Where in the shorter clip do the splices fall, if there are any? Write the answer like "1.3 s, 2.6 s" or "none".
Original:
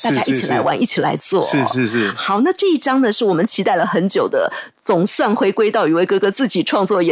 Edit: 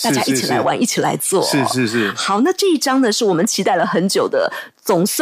none

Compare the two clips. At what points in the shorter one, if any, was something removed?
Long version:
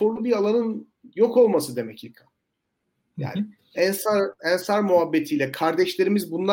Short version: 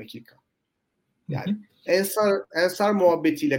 none

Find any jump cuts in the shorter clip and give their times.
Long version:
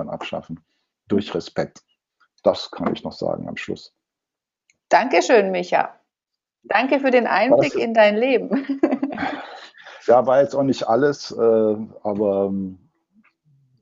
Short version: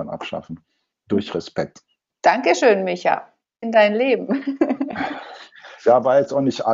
2.1 s, 3.6 s

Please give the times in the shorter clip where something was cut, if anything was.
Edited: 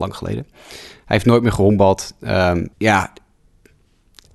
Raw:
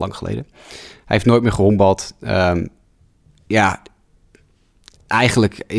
2.7 s

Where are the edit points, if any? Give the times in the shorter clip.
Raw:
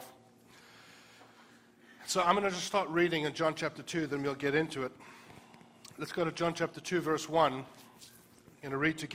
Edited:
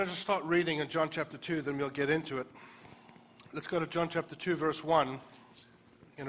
none

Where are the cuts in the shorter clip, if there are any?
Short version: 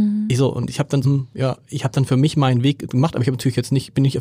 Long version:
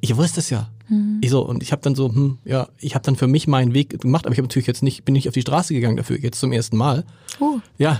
1.0 s

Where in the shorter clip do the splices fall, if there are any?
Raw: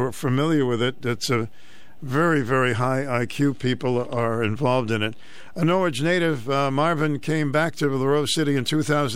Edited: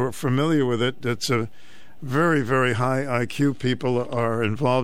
none

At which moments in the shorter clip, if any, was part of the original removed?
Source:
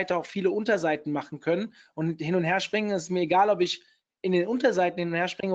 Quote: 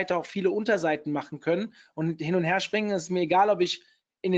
none

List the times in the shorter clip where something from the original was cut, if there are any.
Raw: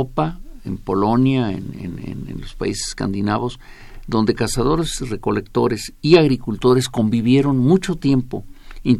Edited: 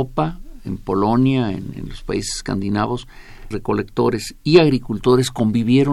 1.7 s, 3.5 s

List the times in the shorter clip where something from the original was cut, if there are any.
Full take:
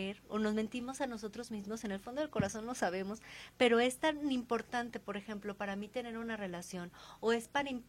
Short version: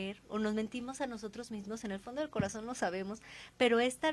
none

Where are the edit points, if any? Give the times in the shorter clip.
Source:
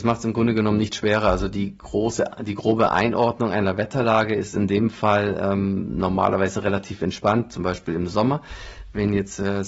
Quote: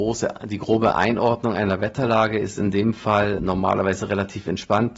3.4 s

